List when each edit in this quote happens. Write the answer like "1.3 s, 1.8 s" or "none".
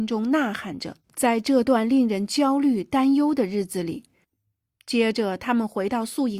1.0 s, 4.2 s